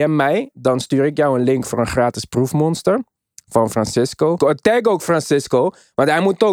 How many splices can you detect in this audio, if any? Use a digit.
1